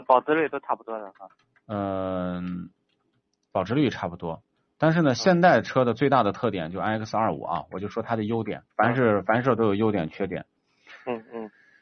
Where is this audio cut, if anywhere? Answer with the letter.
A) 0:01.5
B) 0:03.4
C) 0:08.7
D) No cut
C